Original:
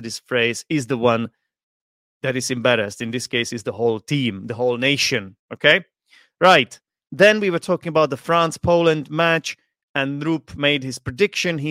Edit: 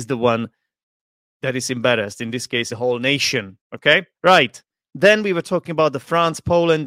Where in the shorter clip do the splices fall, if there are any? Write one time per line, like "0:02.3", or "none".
0:02.7
0:04.1